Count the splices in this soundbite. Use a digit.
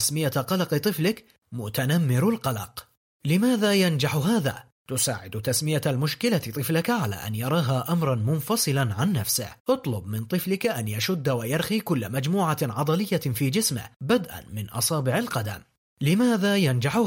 1